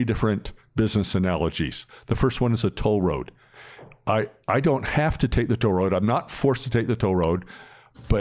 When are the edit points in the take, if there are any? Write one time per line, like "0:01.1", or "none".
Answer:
none